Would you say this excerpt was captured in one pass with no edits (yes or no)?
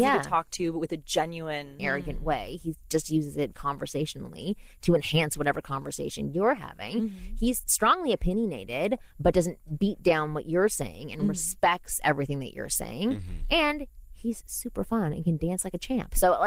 no